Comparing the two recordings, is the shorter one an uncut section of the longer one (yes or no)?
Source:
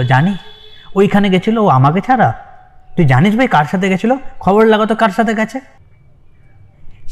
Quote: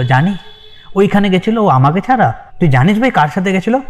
no